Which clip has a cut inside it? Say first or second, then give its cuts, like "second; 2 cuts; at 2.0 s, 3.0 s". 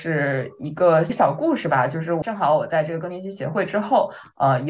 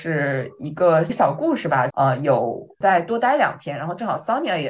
second; 1 cut; at 1.9 s